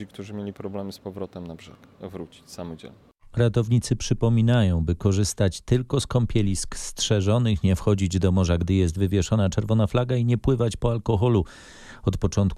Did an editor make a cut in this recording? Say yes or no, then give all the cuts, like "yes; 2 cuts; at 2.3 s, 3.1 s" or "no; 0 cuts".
no; 0 cuts